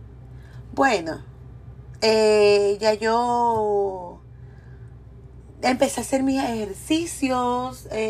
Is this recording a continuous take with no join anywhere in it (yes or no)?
yes